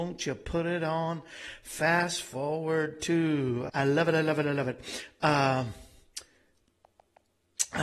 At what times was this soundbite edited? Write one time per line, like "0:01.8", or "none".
0:03.7

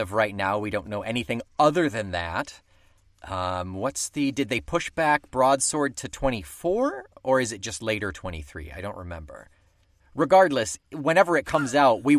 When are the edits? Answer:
none

